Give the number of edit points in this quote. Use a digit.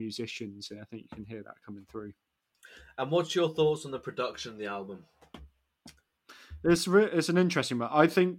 0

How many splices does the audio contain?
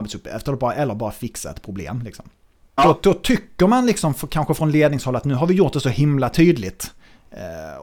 1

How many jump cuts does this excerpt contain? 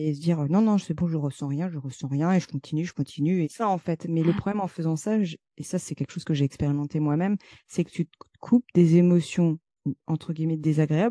1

